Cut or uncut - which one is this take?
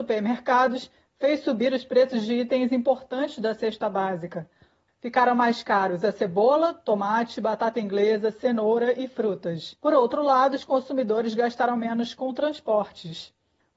cut